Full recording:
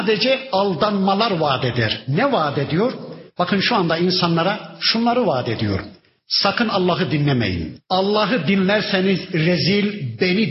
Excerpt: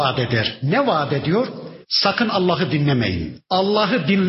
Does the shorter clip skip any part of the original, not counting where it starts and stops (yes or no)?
yes